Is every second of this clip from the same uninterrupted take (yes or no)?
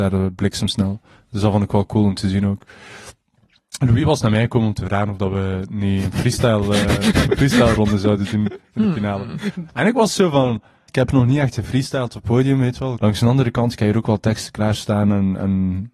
no